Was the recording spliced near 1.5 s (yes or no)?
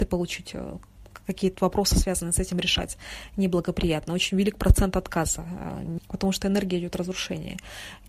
yes